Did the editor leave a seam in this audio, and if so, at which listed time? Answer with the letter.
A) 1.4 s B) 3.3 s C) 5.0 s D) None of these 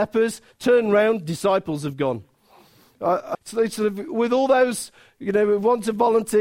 B